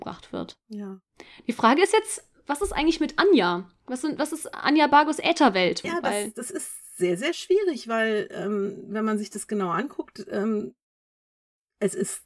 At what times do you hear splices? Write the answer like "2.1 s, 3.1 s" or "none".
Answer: 5.8 s